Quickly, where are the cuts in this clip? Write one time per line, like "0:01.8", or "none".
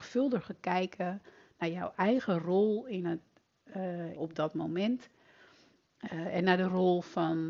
0:04.2